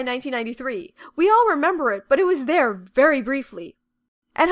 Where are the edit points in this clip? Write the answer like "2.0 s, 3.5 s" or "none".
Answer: none